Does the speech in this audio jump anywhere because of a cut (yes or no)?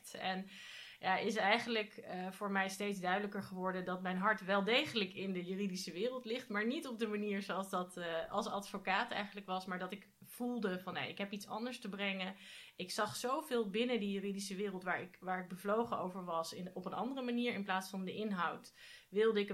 no